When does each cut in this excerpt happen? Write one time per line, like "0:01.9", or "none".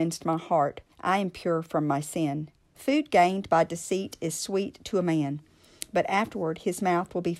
0:00.9
0:02.7

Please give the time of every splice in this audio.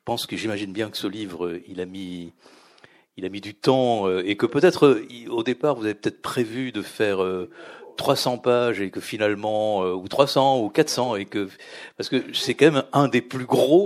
none

